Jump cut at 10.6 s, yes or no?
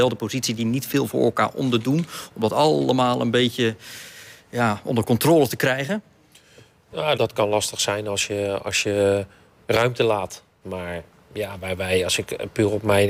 yes